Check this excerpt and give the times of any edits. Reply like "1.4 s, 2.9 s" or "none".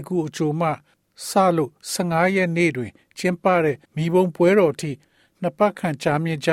3.8 s